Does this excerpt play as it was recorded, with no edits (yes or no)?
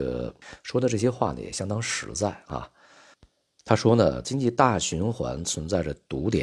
no